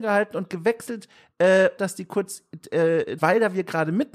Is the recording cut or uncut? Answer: cut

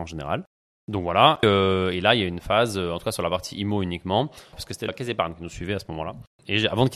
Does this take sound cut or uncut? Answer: cut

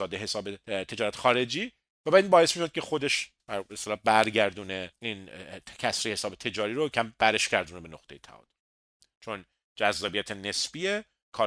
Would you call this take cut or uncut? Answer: cut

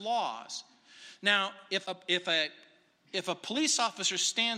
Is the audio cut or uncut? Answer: cut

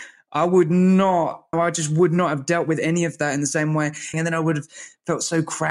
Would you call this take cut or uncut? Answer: cut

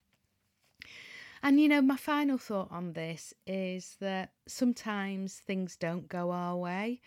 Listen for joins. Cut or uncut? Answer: cut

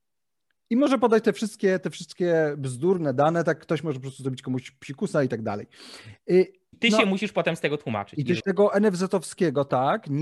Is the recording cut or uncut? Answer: cut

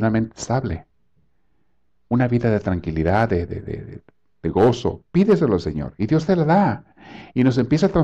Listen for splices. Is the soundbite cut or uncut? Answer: uncut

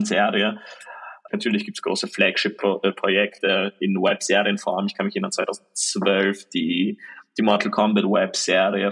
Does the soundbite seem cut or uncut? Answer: cut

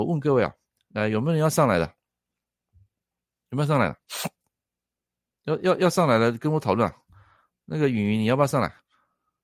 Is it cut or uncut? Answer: uncut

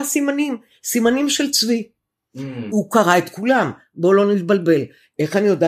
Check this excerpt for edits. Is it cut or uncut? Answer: cut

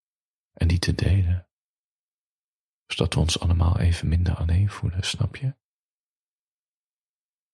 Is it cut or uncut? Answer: uncut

